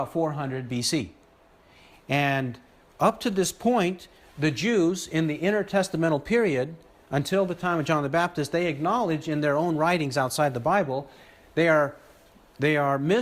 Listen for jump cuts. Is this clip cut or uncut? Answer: uncut